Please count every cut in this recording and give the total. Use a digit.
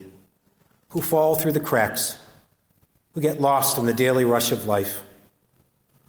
0